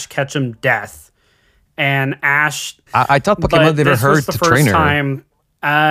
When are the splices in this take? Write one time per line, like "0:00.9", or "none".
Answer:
0:02.9